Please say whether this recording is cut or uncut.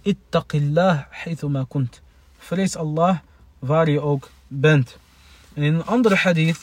uncut